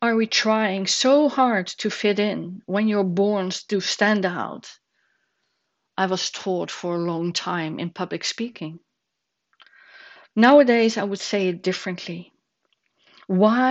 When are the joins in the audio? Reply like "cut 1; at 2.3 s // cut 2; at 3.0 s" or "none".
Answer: none